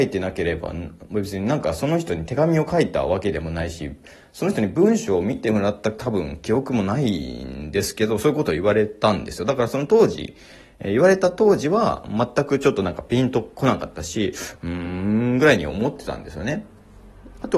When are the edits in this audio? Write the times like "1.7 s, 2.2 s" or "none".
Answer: none